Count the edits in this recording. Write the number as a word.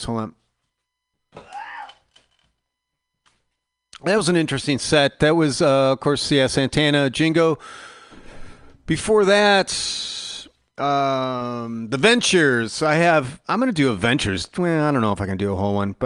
zero